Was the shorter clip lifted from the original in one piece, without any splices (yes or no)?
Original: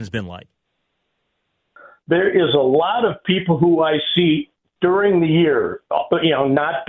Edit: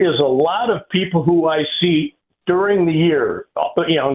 yes